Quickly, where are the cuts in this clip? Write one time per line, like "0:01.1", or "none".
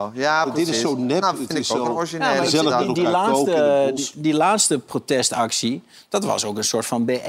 none